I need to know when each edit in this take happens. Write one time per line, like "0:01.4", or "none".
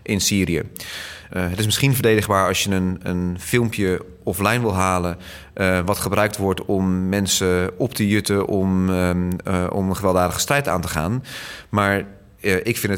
0:01.3